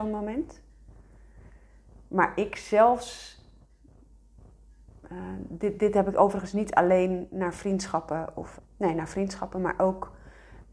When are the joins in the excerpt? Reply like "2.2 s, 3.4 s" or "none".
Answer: 8.6 s